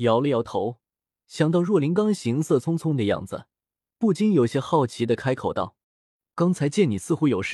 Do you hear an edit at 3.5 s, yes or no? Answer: no